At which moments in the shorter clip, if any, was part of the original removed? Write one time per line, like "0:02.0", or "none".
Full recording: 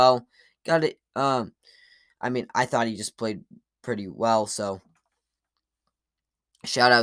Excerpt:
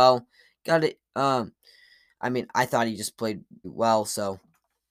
0:03.6